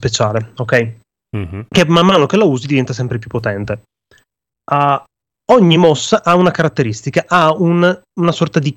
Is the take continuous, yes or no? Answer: yes